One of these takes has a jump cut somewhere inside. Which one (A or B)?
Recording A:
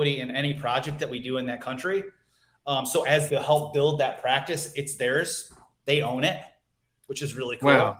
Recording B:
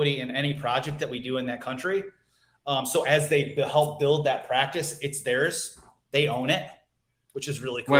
A